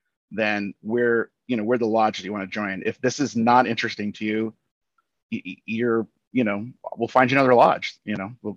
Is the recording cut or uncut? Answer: uncut